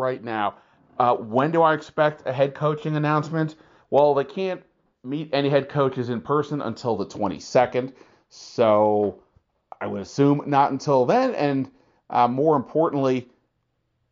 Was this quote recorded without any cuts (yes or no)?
yes